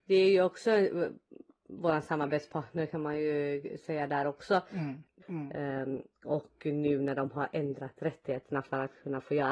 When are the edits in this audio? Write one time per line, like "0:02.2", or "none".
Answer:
0:05.2